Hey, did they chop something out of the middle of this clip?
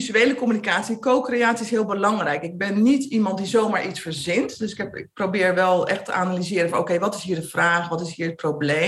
no; 0 cuts

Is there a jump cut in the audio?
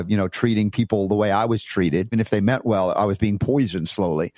yes; 1 cut; at 2.1 s

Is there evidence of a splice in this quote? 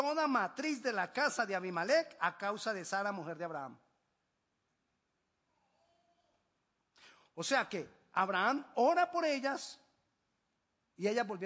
no; 0 cuts

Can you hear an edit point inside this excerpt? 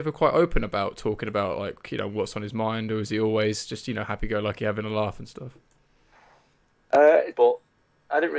yes; 1 cut; at 7.3 s

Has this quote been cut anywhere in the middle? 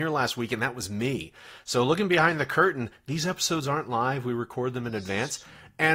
no; 0 cuts

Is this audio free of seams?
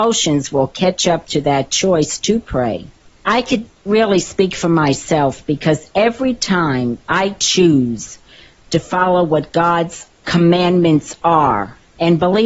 yes; 0 cuts

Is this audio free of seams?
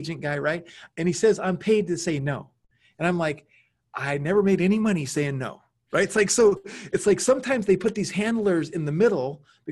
yes; 0 cuts

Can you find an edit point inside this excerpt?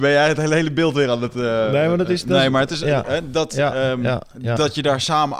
no; 0 cuts

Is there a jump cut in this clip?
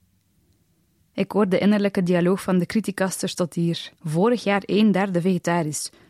yes; 1 cut; at 3.9 s

